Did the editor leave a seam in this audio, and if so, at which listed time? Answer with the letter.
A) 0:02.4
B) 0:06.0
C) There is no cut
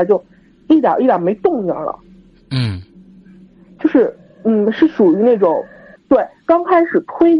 B